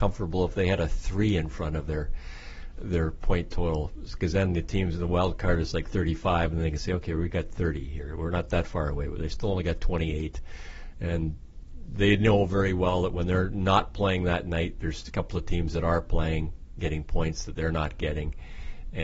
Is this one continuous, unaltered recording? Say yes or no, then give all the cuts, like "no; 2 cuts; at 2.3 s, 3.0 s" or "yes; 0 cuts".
yes; 0 cuts